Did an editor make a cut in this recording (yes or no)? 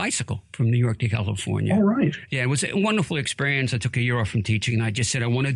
no